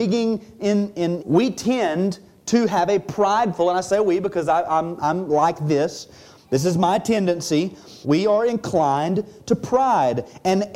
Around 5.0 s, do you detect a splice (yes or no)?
no